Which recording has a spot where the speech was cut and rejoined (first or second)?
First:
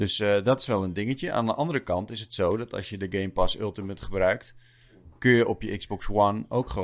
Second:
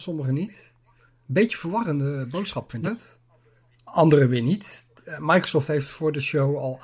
second